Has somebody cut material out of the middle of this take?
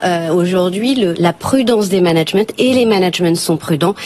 yes; 1 cut; at 1.1 s

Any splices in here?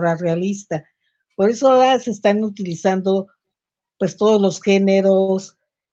no; 0 cuts

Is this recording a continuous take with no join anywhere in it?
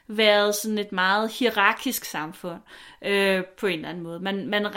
yes; 0 cuts

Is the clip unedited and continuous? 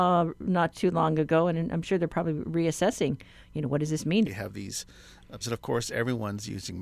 no; 2 cuts; at 4.2 s, 5.4 s

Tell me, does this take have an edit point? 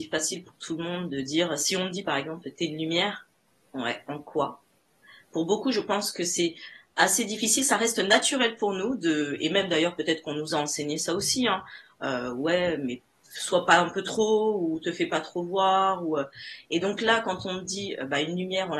no; 0 cuts

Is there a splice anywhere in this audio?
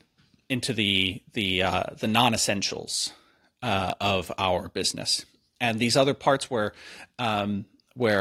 no; 0 cuts

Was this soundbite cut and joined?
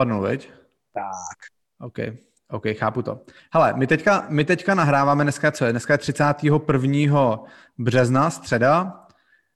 no; 0 cuts

